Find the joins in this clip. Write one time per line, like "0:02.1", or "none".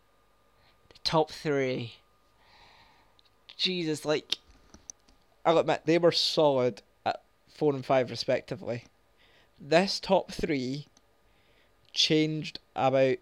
0:05.9